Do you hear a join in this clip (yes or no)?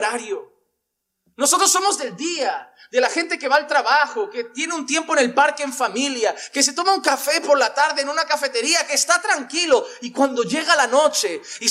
no